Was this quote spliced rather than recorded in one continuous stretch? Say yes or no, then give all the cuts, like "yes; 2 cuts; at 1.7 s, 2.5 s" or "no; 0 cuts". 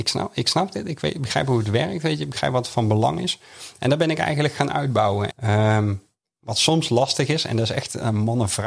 yes; 1 cut; at 5.3 s